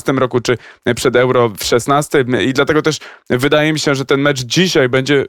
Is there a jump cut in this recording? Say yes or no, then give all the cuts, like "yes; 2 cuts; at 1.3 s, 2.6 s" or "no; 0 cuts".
no; 0 cuts